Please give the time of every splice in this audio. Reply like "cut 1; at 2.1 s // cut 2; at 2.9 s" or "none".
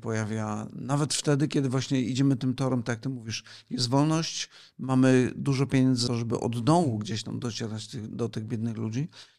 cut 1; at 6.1 s